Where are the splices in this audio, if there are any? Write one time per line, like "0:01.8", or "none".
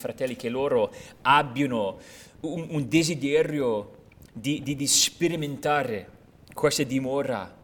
none